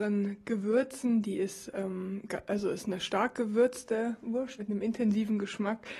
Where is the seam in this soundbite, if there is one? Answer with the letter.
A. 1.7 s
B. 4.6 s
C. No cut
B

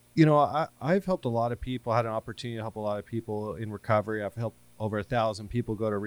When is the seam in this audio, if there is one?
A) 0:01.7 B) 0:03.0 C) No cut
C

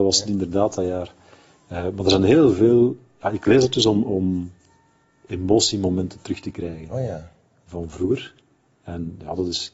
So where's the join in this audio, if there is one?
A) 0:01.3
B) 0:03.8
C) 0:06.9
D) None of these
D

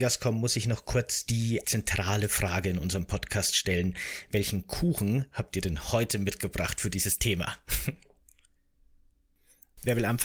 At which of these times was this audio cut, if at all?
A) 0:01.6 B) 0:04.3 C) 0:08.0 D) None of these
A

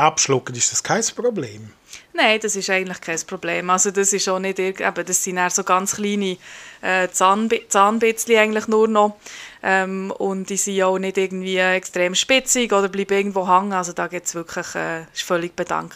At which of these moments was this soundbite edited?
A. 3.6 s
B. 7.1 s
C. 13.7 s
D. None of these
D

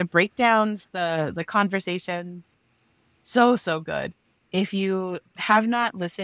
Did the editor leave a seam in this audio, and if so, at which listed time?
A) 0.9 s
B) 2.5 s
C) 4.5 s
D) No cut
C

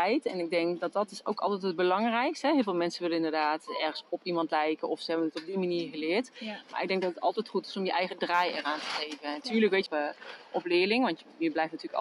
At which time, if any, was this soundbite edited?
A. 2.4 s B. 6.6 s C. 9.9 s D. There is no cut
C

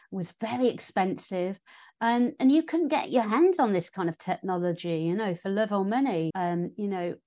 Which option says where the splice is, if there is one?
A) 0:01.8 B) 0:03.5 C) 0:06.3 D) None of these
C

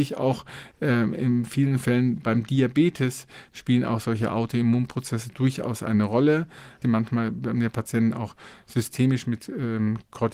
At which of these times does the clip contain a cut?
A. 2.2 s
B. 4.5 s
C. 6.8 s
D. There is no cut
C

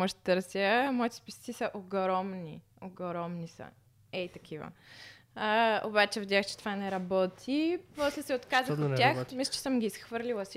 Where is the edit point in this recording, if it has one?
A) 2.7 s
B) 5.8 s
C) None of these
C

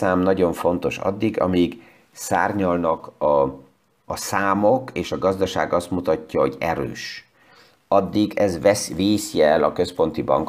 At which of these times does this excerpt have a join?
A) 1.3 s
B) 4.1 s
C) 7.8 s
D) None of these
B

